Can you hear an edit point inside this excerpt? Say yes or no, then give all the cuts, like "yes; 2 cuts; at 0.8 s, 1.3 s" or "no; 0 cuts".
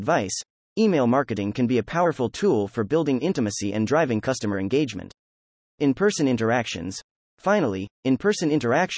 no; 0 cuts